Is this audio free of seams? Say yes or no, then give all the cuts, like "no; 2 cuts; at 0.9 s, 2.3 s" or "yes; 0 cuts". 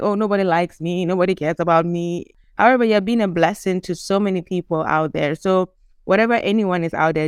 yes; 0 cuts